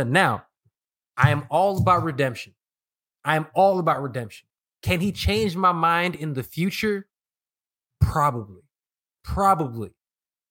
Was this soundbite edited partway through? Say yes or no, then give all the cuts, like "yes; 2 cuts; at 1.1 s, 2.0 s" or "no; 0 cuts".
no; 0 cuts